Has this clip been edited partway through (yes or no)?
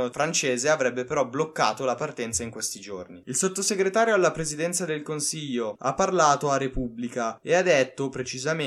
yes